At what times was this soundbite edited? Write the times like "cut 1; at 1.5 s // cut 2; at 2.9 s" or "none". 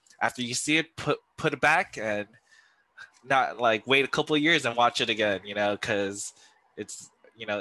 none

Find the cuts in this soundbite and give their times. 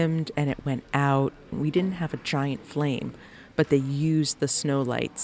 cut 1; at 1.5 s

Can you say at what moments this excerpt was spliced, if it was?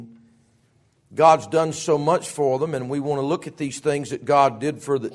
none

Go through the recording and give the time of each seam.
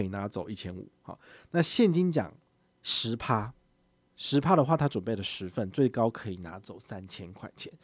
none

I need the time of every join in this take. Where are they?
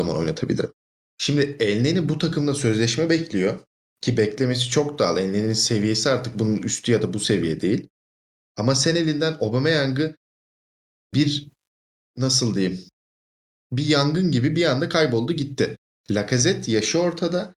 none

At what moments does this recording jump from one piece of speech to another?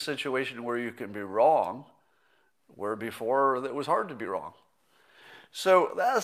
none

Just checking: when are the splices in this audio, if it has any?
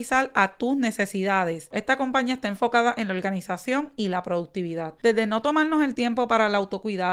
cut 1; at 1.7 s // cut 2; at 5.0 s

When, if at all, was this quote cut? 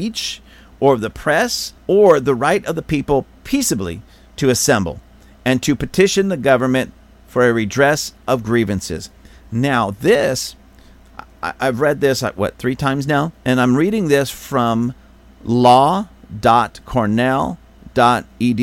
none

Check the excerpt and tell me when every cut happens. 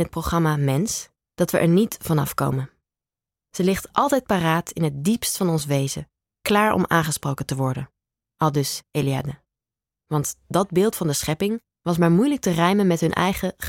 cut 1; at 10.0 s

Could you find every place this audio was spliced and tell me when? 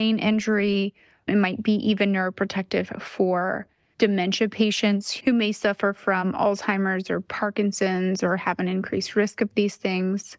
none

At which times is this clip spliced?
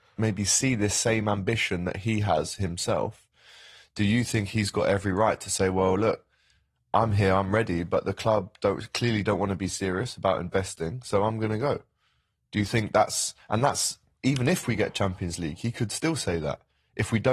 none

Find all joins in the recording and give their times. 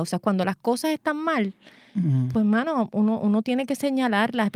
none

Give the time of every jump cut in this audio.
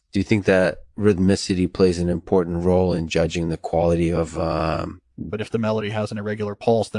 cut 1; at 5.3 s

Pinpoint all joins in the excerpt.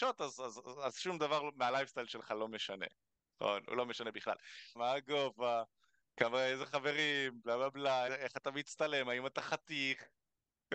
cut 1; at 4.8 s // cut 2; at 8.1 s

